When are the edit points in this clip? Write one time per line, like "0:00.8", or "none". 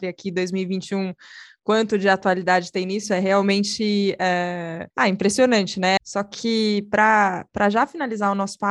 0:04.9
0:06.0